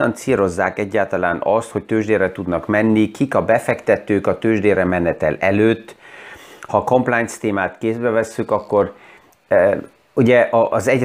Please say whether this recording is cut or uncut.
uncut